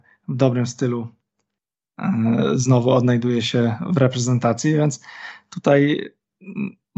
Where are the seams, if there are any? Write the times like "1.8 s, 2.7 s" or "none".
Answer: none